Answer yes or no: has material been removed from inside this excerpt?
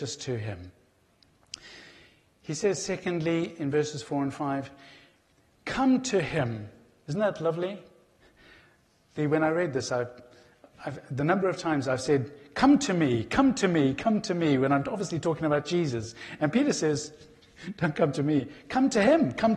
no